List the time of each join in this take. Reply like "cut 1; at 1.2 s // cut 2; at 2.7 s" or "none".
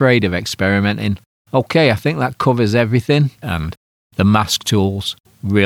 cut 1; at 1.4 s // cut 2; at 3.4 s